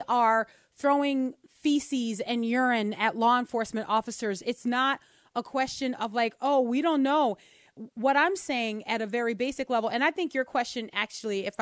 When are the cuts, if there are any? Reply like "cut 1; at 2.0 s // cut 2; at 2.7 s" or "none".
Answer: none

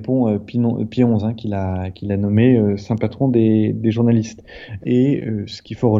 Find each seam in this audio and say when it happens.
cut 1; at 4.8 s

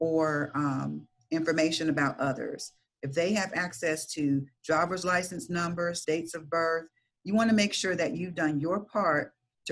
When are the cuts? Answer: cut 1; at 2.9 s // cut 2; at 6.0 s

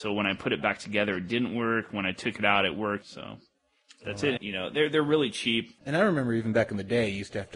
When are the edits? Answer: cut 1; at 3.0 s // cut 2; at 4.4 s // cut 3; at 5.8 s

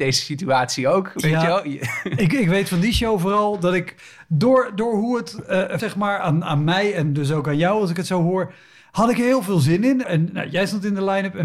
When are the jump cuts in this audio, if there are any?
cut 1; at 5.8 s // cut 2; at 10.0 s

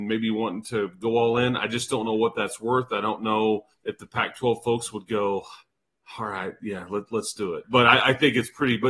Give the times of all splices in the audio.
cut 1; at 3.7 s // cut 2; at 7.6 s

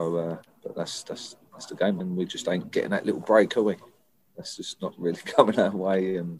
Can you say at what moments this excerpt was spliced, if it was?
cut 1; at 2.0 s

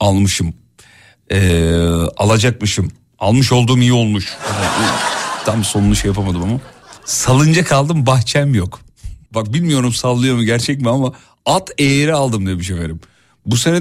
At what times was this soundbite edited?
cut 1; at 7.0 s // cut 2; at 9.3 s

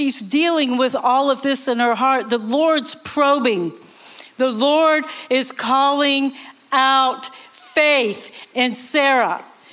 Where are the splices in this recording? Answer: none

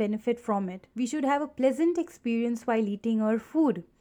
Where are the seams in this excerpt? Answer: cut 1; at 0.9 s

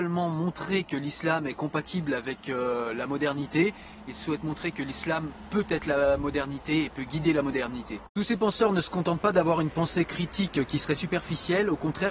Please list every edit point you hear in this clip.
none

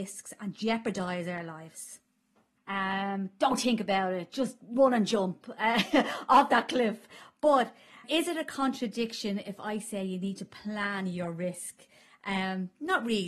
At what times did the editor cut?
cut 1; at 2.6 s

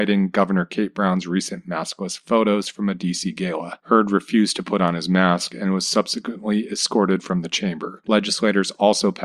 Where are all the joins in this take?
cut 1; at 8.0 s

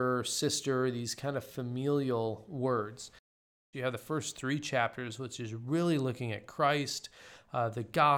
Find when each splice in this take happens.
cut 1; at 3.7 s

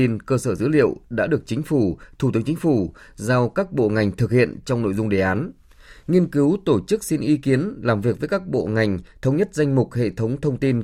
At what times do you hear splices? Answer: none

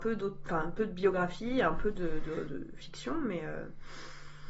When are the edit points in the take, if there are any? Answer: none

